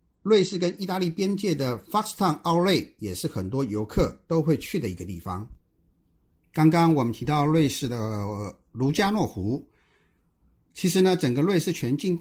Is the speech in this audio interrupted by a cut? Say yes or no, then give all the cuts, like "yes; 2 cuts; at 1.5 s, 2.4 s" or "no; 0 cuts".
no; 0 cuts